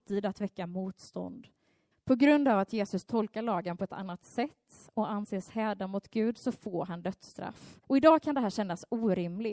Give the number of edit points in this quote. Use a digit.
2